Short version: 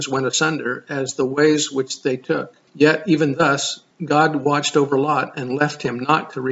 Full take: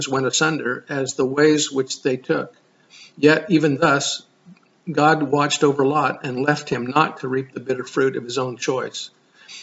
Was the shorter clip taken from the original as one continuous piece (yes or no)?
no